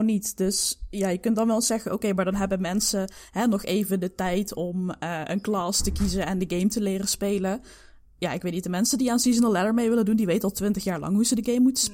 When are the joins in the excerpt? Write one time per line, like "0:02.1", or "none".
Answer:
none